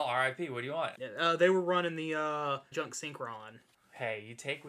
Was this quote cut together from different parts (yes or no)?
yes